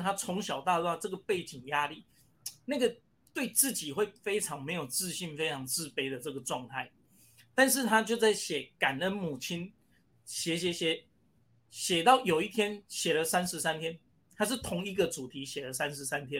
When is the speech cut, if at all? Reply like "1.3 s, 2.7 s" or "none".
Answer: none

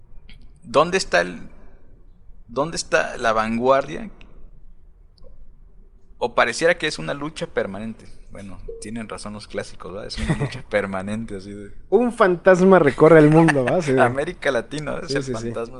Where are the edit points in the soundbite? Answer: none

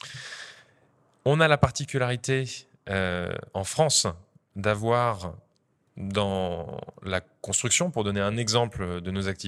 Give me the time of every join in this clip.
none

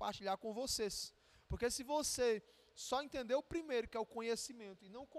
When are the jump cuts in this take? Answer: none

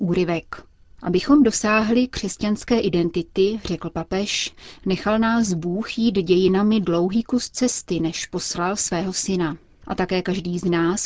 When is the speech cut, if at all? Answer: none

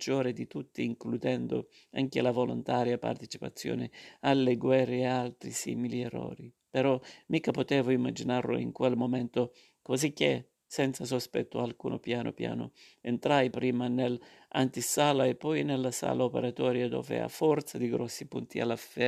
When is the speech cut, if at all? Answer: none

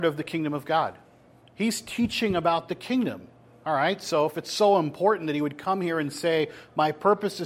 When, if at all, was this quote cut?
1.4 s

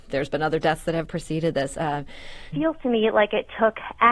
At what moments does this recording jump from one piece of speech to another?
2.5 s

